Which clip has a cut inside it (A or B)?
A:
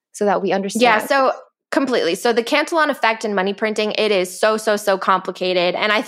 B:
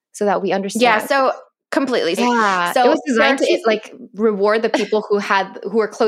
B